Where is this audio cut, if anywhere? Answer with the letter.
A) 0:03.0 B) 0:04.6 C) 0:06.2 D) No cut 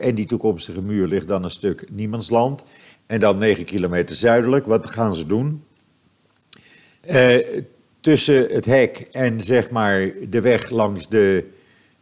A